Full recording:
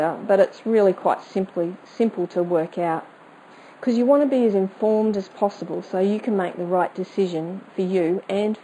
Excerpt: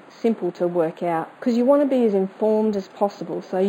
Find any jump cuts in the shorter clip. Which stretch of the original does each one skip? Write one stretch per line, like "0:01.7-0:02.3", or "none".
0:03.1-0:03.8